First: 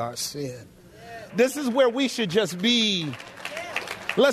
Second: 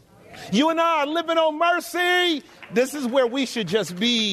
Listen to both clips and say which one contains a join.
first; 1 cut; at 1.3 s

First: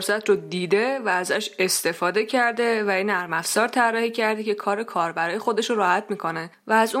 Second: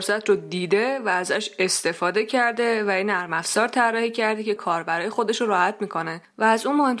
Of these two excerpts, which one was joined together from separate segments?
second; 1 cut; at 4.6 s

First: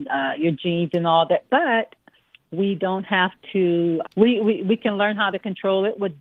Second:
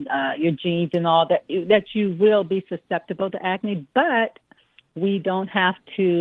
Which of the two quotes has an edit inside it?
first; 2 cuts; at 1.5 s, 4.0 s

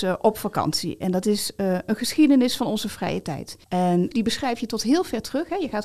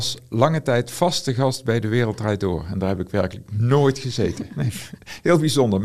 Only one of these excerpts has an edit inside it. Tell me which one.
first; 1 cut; at 3.6 s

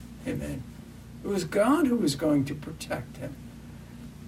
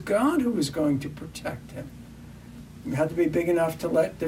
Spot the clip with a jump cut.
second; 1 cut; at 2.8 s

